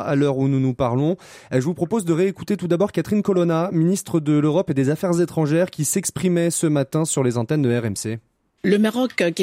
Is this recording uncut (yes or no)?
yes